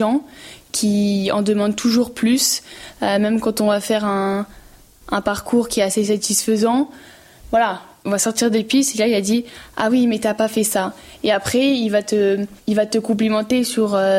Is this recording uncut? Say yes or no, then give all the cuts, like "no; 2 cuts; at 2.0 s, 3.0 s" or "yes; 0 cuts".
yes; 0 cuts